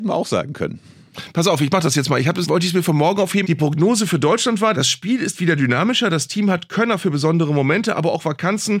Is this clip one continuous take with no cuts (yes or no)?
no